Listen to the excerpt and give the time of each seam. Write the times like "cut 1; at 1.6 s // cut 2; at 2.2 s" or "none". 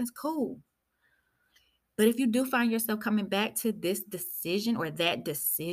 none